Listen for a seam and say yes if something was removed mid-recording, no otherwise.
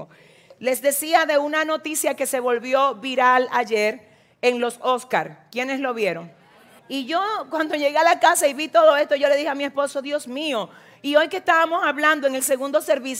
yes